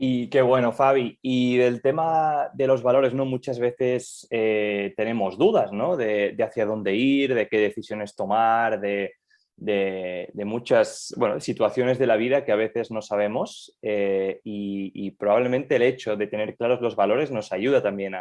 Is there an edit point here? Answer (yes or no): no